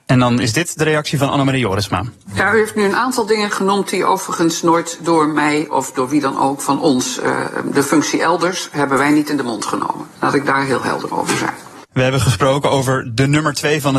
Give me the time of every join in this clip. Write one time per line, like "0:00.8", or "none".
0:11.9